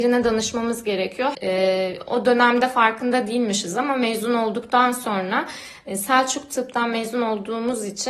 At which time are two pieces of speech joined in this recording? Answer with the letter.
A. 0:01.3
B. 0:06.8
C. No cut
A